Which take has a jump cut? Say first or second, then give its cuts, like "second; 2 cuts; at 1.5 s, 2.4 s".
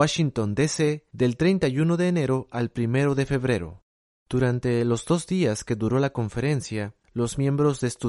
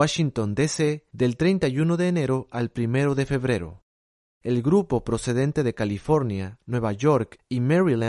first; 1 cut; at 4.2 s